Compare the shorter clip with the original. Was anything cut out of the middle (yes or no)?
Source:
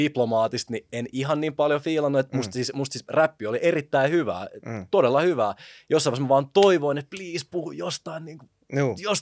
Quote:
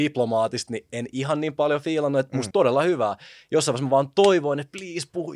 yes